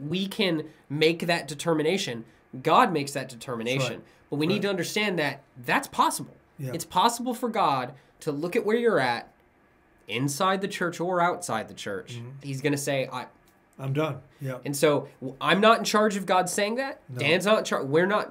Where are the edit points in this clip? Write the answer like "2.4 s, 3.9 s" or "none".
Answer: 12.4 s, 14.3 s